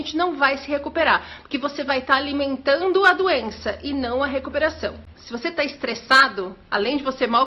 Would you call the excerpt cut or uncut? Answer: cut